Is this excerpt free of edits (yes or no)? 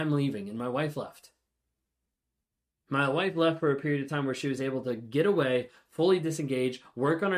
yes